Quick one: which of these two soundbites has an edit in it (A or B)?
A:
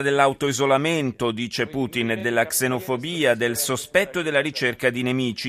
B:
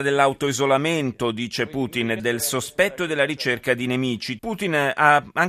B